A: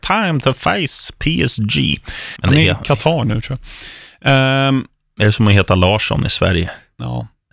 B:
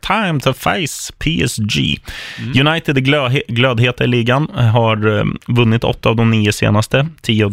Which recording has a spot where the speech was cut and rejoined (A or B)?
A